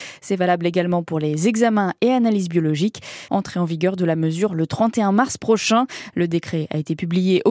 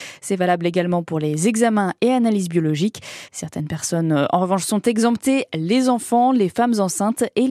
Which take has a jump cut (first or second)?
first